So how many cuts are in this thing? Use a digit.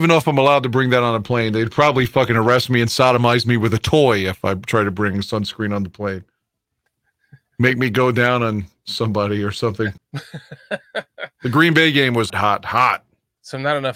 3